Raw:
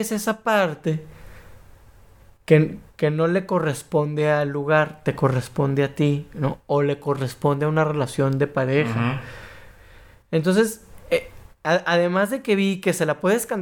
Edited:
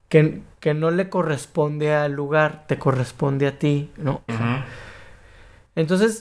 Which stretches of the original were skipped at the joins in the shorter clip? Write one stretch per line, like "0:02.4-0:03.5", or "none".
0:06.6-0:08.8